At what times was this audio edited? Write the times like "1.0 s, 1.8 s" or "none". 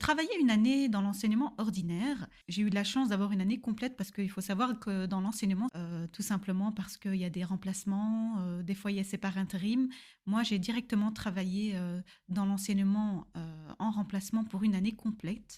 2.4 s, 5.7 s